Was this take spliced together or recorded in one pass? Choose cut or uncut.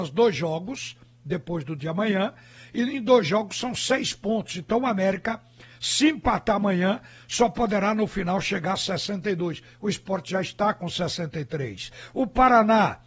uncut